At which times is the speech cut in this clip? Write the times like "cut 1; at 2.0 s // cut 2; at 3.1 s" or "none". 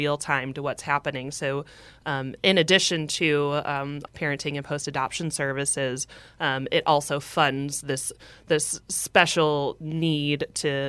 cut 1; at 4.1 s